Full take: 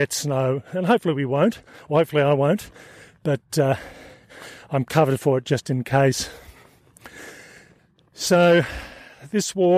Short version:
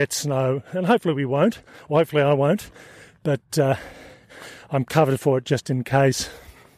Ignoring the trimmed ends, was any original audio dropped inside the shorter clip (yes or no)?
no